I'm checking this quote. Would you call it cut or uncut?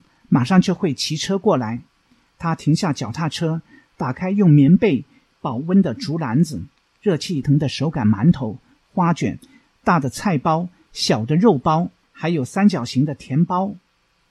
cut